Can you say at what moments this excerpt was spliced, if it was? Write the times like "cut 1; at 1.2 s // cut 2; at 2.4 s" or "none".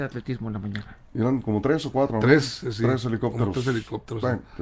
none